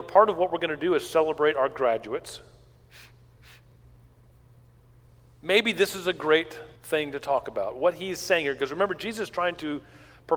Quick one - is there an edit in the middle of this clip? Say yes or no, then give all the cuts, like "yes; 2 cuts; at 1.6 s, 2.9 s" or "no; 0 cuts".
yes; 1 cut; at 6.8 s